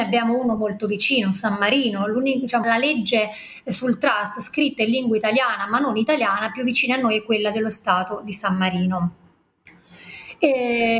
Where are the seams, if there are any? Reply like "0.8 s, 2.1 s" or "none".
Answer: 2.6 s